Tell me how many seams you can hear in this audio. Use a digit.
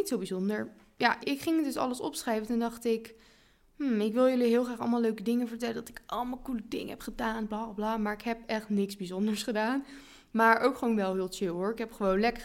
1